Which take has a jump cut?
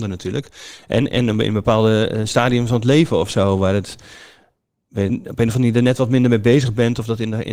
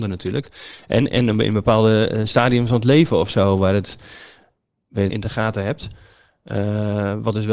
second; 1 cut; at 5.1 s

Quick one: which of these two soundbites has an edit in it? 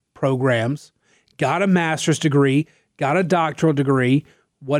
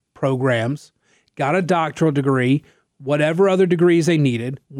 second; 1 cut; at 1.3 s

